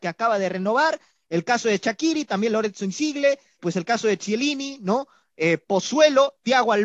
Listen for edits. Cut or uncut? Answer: cut